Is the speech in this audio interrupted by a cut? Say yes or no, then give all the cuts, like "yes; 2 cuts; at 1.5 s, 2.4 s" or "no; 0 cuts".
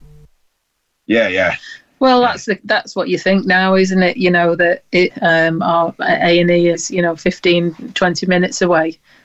yes; 2 cuts; at 5.1 s, 6.7 s